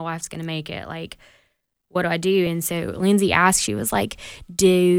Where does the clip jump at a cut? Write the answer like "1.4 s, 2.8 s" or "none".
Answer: none